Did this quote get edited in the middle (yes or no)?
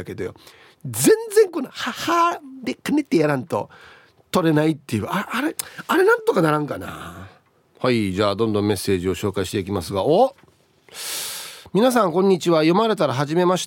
no